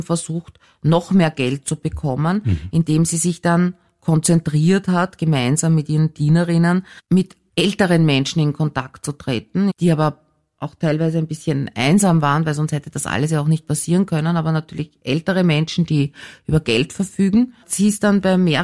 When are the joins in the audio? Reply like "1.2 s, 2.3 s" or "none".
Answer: none